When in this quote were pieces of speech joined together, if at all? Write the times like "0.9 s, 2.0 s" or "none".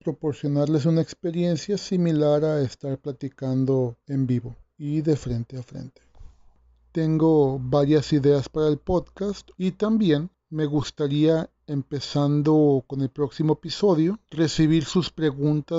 9.5 s

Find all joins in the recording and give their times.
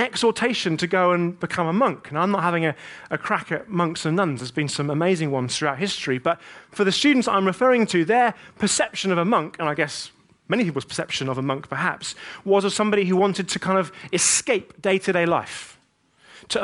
none

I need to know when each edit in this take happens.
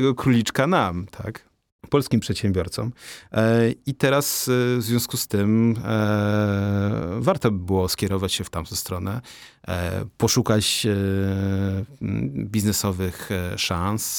none

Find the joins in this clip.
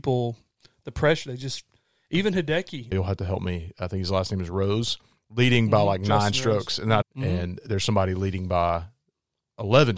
2.9 s, 7.0 s

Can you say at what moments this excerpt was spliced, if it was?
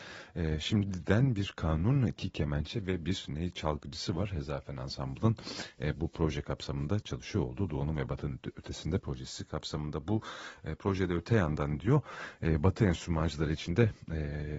none

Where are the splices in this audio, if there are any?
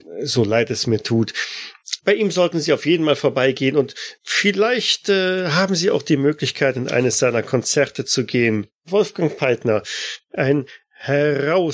2.0 s

